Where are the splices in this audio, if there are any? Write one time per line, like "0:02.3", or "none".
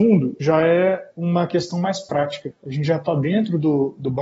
none